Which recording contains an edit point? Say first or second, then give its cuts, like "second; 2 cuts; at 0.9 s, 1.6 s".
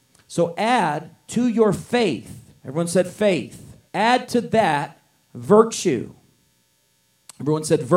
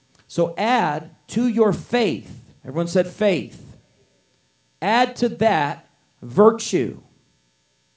first; 1 cut; at 3.9 s